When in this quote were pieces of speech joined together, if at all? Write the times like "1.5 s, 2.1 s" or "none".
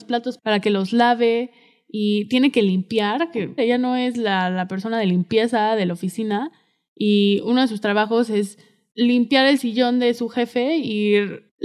3.6 s